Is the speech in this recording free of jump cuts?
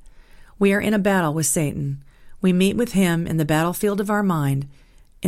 yes; 0 cuts

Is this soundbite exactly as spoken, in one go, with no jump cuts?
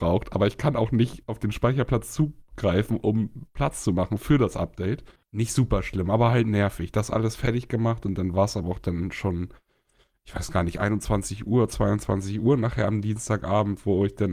no; 1 cut; at 5.2 s

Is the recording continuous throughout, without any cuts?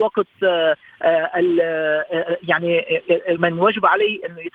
no; 1 cut; at 3.4 s

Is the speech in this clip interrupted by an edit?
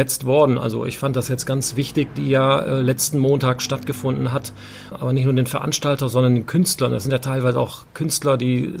yes; 2 cuts; at 2.1 s, 4.9 s

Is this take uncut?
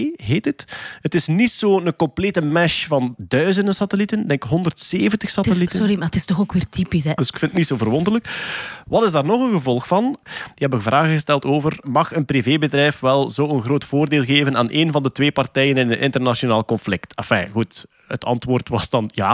no; 2 cuts; at 7.2 s, 10.2 s

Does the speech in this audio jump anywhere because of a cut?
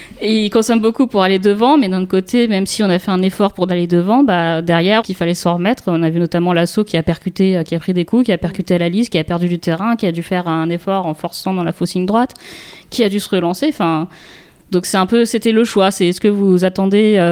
yes; 1 cut; at 5.0 s

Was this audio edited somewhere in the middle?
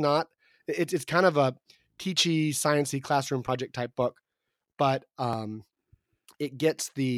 no; 0 cuts

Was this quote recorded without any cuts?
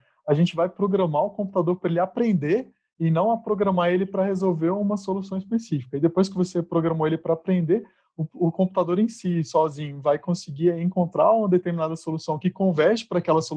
yes; 0 cuts

